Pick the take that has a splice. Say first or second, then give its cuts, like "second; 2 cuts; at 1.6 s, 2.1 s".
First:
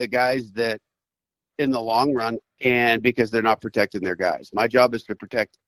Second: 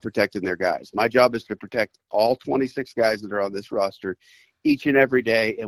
first; 1 cut; at 2.4 s